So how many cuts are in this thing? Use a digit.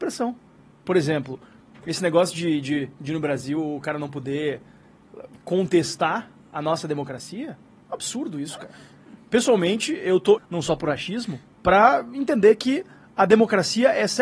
2